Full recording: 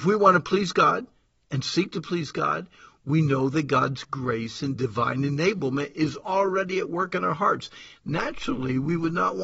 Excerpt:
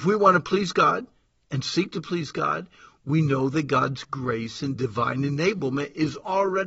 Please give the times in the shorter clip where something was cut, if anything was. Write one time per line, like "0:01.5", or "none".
none